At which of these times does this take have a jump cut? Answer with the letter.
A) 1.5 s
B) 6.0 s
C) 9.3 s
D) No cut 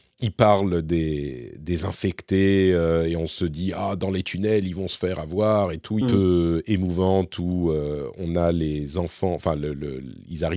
B